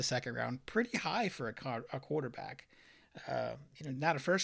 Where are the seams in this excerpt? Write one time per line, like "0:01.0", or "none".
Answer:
none